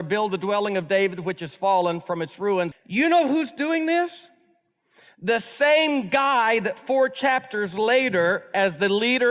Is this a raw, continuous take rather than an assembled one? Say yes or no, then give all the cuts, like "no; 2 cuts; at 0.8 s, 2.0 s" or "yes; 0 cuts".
no; 1 cut; at 2.7 s